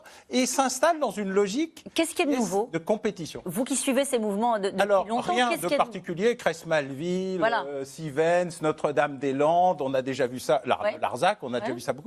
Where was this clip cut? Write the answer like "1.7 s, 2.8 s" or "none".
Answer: none

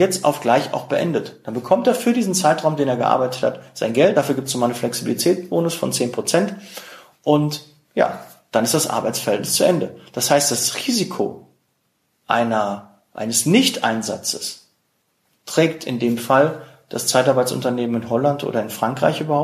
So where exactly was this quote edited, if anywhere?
none

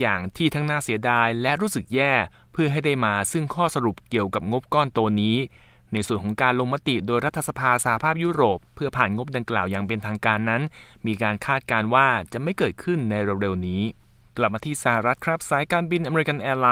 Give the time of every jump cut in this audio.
none

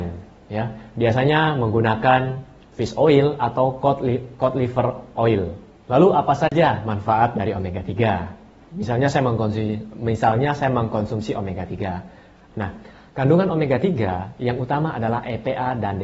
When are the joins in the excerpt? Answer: 12.5 s

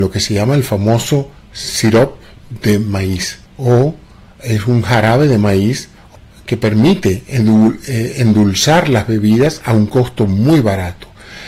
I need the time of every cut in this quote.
3.5 s

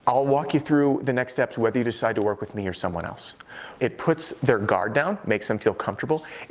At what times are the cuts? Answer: 3.8 s

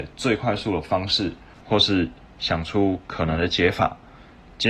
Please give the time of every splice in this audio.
1.6 s

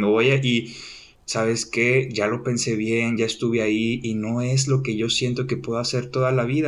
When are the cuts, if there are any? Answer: 1.1 s

